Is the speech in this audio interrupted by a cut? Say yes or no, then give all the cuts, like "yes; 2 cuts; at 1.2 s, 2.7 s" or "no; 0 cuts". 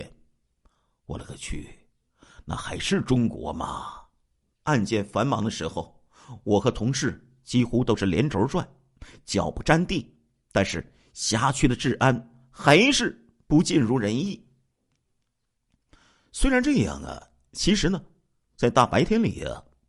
yes; 1 cut; at 4.5 s